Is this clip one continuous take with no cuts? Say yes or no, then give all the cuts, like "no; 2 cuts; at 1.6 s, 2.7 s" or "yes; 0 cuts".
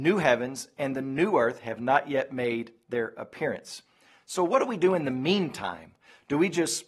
yes; 0 cuts